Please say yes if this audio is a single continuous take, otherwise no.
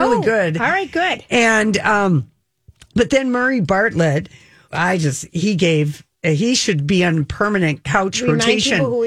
no